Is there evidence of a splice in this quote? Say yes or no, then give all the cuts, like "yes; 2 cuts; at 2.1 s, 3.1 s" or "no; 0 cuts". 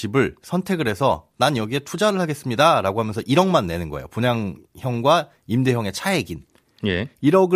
no; 0 cuts